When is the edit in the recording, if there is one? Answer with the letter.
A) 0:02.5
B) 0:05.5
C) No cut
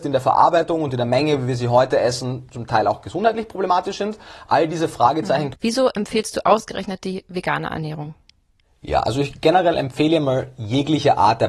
B